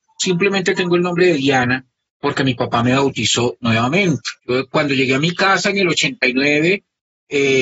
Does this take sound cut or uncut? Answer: cut